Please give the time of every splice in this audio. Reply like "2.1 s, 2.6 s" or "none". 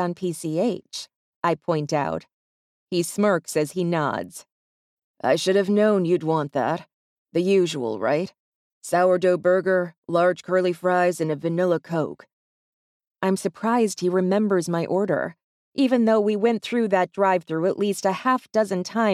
none